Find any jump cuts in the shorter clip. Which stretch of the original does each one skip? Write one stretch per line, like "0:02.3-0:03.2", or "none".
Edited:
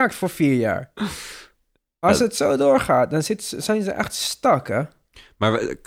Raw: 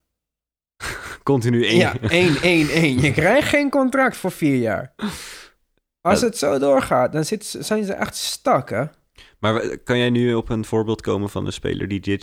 none